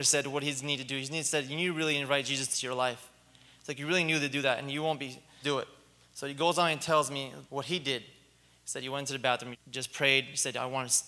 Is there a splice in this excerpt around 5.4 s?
yes; 3 cuts; at 5.4 s, 7.4 s, 9.5 s

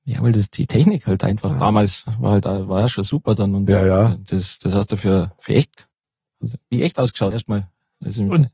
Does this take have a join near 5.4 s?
no; 1 cut; at 7.3 s

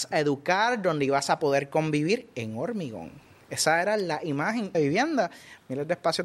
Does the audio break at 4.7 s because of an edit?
yes; 1 cut; at 4.7 s

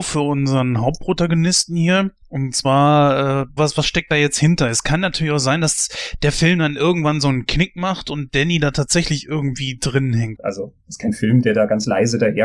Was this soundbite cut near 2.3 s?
no; 2 cuts; at 3.6 s, 10.4 s

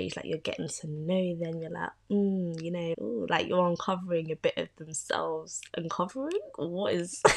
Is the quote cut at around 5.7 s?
no; 1 cut; at 2.9 s

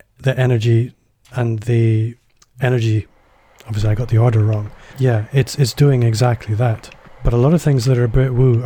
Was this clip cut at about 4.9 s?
yes; 3 cuts; at 1.2 s, 4.9 s, 7.1 s

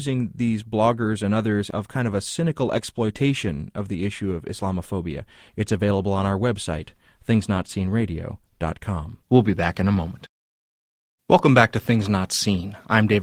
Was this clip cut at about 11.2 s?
no; 2 cuts; at 5.5 s, 9.2 s

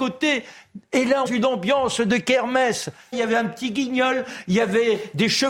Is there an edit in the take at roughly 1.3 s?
yes; 2 cuts; at 1.3 s, 3.1 s

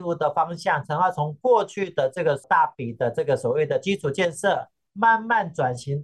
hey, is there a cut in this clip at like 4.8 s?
no; 0 cuts

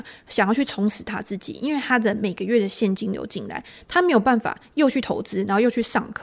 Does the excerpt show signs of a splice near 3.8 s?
no; 0 cuts

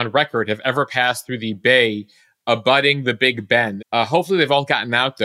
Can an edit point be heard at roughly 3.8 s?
yes; 1 cut; at 3.8 s

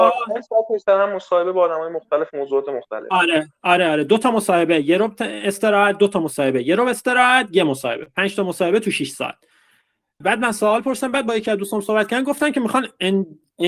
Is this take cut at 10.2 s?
yes; 1 cut; at 10.2 s

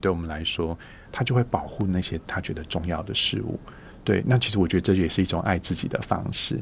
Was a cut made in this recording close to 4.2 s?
no; 1 cut; at 1.0 s

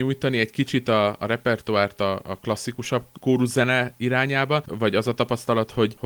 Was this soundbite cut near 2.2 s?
no; 0 cuts

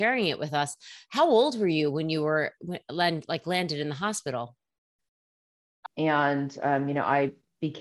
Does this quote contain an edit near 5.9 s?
yes; 1 cut; at 5.9 s

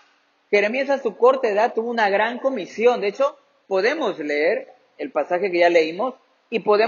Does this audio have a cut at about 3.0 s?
no; 0 cuts

